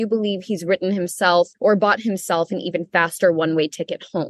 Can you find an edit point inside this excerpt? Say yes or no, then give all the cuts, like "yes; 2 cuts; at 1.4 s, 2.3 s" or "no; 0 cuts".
yes; 1 cut; at 1.5 s